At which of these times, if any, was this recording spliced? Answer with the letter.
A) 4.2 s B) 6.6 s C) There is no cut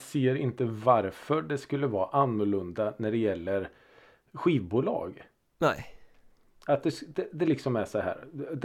C